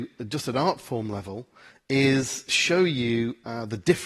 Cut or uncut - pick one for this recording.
uncut